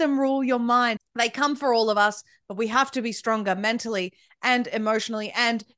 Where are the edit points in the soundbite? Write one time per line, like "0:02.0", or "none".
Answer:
0:01.0